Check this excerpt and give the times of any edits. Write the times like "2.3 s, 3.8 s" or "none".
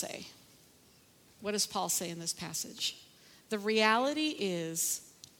none